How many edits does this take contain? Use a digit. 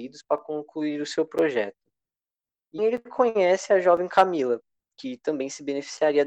1